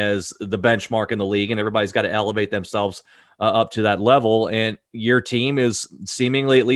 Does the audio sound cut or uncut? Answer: uncut